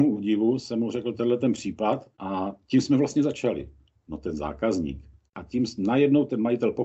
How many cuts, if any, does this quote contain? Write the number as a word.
three